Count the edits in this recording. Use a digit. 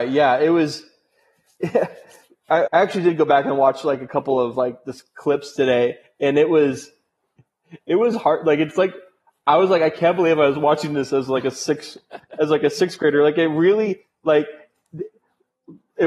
1